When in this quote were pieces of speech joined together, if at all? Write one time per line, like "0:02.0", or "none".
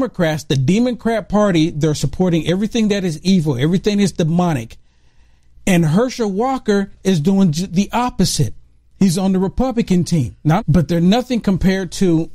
0:10.6